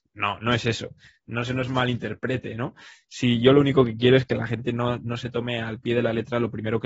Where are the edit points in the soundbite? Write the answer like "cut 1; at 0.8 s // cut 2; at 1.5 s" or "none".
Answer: none